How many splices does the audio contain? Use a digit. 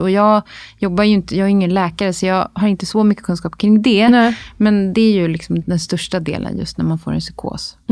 1